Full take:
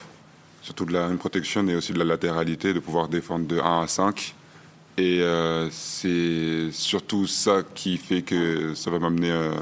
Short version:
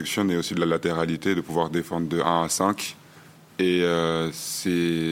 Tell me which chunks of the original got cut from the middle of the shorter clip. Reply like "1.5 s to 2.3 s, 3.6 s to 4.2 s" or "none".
none